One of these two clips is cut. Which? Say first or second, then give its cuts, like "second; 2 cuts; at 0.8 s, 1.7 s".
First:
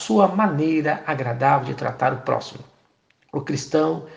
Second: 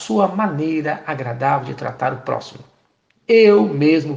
second; 1 cut; at 3.2 s